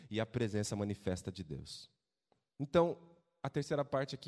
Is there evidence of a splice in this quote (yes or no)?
no